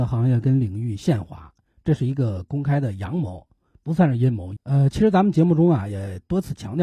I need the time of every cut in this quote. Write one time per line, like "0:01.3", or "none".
0:04.6